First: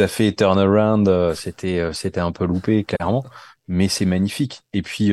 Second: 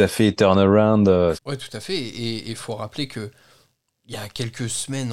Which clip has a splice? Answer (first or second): second